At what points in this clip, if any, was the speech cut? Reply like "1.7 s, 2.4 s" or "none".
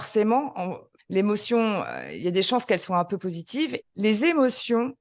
1.0 s, 3.8 s